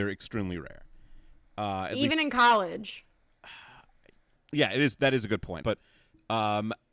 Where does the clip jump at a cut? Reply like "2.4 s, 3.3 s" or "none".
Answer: 4.3 s, 5.6 s